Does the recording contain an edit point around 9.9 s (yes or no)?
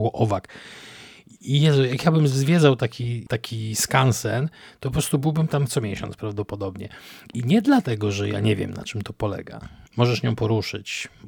yes